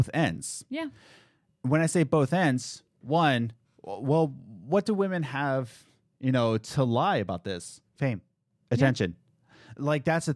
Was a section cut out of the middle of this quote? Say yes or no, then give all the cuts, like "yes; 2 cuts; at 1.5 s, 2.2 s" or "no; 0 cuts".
yes; 1 cut; at 7.9 s